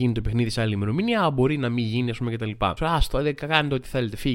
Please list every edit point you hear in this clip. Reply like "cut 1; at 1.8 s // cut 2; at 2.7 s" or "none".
cut 1; at 2.8 s